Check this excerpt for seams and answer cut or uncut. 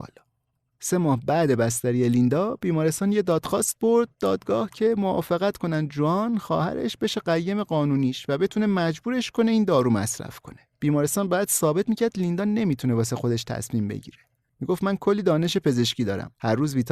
cut